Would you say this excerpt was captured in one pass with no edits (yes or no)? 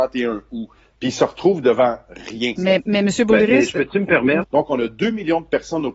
no